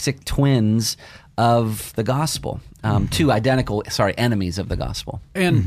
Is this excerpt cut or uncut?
uncut